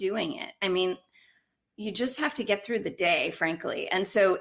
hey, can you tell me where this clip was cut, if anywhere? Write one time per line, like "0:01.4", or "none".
none